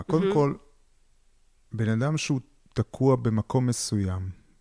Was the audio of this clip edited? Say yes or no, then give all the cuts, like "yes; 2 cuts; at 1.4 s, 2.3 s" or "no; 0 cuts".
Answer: no; 0 cuts